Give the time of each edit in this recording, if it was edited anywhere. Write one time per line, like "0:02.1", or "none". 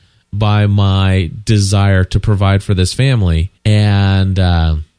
0:03.6